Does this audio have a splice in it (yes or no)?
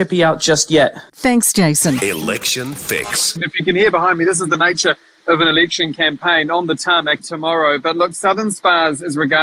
yes